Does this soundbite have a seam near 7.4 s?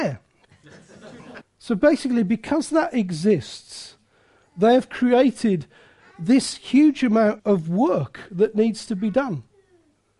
yes; 2 cuts; at 1.4 s, 7.4 s

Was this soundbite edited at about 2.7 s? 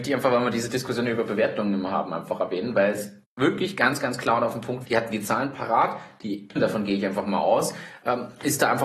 no; 2 cuts; at 4.8 s, 6.6 s

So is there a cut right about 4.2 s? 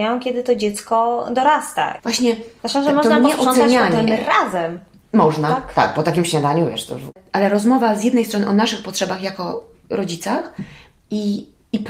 no; 1 cut; at 2.0 s

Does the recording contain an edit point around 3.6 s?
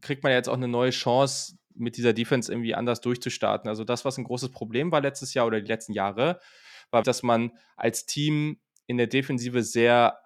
no; 1 cut; at 7.0 s

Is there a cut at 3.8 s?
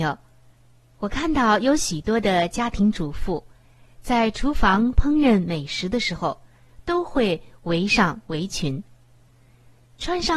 no; 0 cuts

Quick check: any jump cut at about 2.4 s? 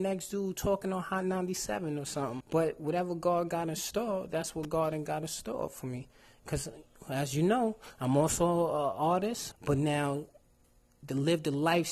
yes; 2 cuts; at 2.4 s, 9.5 s

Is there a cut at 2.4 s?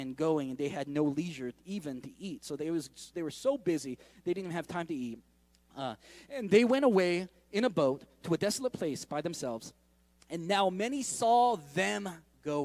no; 0 cuts

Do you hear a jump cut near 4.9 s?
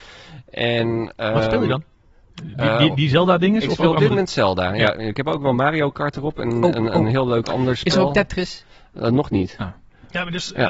no; 0 cuts

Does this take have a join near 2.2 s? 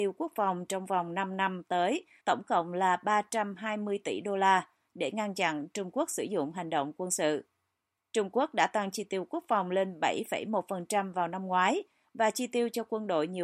yes; 1 cut; at 2.2 s

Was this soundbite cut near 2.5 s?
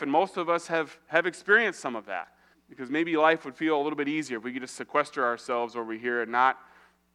yes; 1 cut; at 2.5 s

